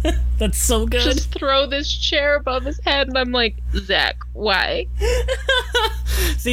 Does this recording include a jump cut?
no; 0 cuts

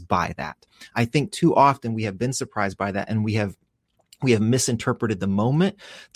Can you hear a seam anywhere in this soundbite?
no; 0 cuts

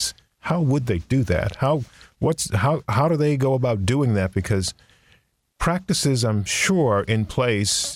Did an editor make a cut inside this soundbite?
no; 0 cuts

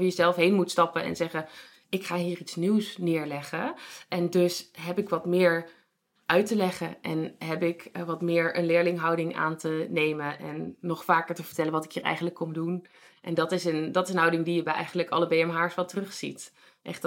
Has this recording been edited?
no; 0 cuts

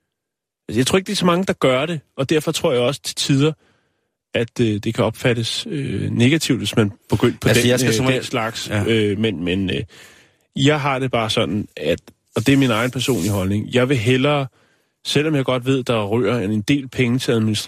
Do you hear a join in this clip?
no; 0 cuts

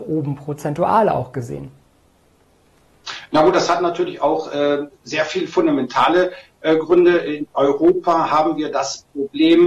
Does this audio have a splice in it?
no; 0 cuts

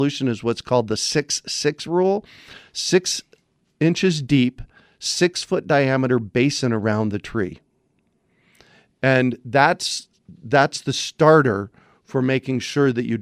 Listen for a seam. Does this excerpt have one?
no; 0 cuts

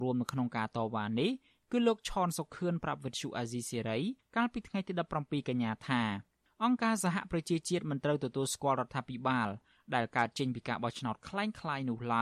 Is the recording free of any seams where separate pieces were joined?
yes; 0 cuts

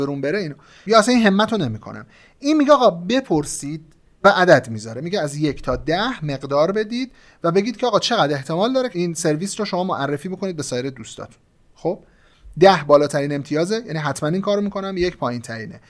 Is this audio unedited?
yes; 0 cuts

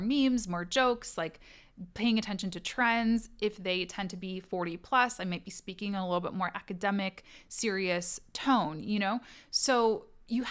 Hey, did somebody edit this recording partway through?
no; 0 cuts

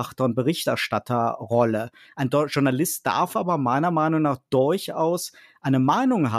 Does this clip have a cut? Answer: yes; 1 cut; at 2.0 s

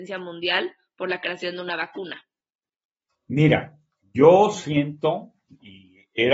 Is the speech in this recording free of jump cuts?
yes; 0 cuts

